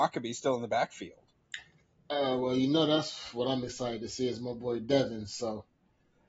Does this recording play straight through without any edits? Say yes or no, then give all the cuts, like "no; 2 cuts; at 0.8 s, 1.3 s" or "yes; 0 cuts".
yes; 0 cuts